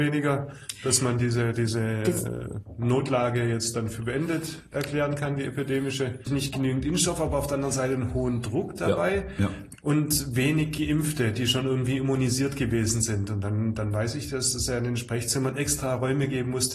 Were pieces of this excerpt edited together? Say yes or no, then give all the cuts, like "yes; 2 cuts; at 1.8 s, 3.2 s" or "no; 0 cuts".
yes; 1 cut; at 6.3 s